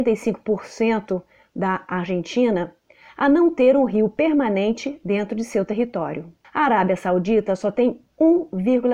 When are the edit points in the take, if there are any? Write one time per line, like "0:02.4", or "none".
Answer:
0:06.4